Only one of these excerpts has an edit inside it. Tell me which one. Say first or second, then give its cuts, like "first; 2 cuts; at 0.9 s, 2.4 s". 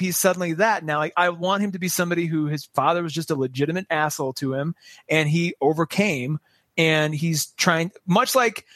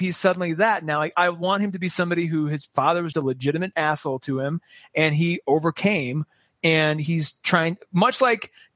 second; 1 cut; at 3.1 s